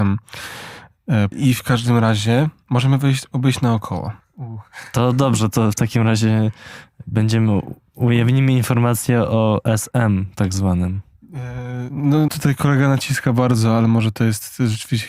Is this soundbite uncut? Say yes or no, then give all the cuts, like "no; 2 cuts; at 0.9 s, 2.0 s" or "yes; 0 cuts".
no; 3 cuts; at 1.3 s, 4.2 s, 12.3 s